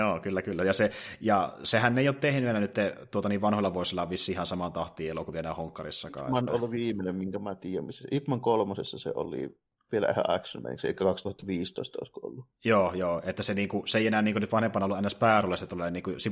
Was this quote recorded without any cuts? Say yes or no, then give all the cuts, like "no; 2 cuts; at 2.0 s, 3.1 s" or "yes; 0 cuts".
yes; 0 cuts